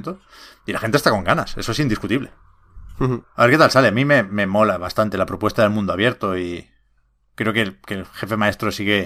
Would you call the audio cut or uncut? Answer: cut